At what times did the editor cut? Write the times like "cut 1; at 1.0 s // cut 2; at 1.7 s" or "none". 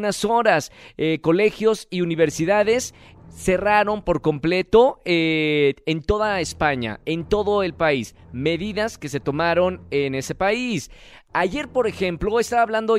none

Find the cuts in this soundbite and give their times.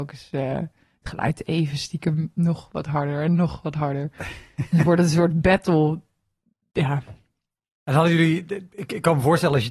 none

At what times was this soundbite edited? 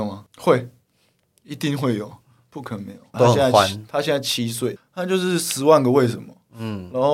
cut 1; at 3.1 s // cut 2; at 4.8 s

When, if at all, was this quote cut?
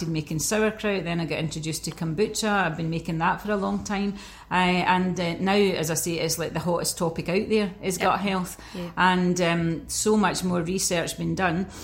none

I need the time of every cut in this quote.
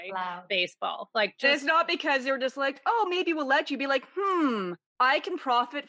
none

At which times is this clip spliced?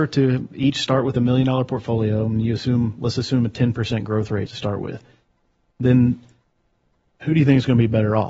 cut 1; at 4.5 s

